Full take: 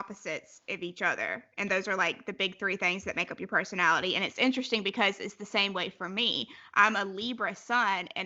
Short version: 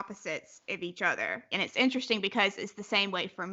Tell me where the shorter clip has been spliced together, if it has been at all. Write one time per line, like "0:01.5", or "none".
0:01.5